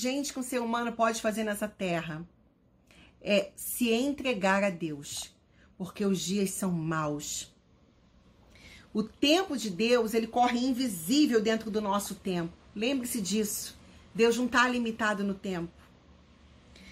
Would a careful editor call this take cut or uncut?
uncut